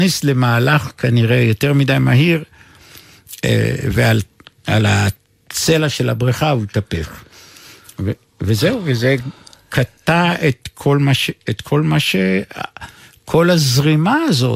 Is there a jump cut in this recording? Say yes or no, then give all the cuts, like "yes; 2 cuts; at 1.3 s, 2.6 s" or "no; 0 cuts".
no; 0 cuts